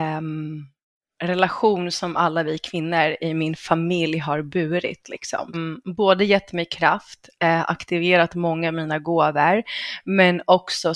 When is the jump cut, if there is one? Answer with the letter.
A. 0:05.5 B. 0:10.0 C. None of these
A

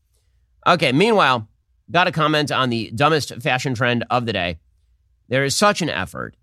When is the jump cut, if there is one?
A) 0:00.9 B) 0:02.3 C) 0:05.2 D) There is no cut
D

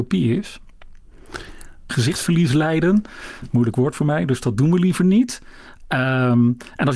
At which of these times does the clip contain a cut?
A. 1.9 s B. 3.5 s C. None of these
A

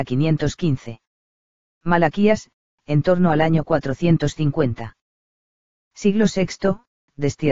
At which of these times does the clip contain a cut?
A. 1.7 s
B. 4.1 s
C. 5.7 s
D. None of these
C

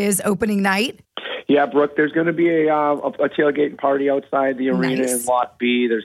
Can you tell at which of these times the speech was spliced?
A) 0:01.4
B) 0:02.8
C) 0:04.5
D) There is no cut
D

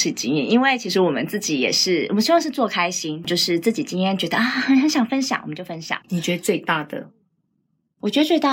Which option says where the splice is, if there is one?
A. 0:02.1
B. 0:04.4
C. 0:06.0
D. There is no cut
C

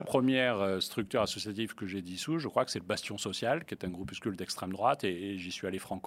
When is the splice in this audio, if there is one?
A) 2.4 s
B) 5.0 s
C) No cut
C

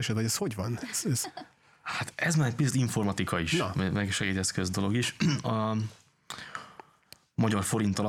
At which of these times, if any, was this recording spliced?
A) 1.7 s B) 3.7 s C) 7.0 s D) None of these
D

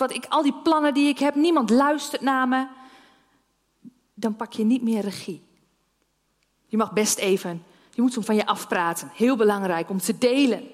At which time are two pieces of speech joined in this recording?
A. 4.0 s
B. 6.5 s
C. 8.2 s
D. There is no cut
C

